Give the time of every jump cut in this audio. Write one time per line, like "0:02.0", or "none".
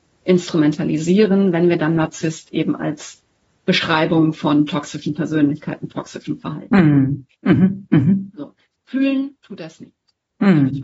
none